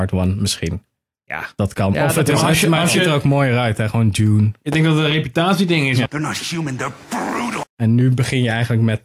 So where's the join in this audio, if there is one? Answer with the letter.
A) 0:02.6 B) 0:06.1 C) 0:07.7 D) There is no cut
B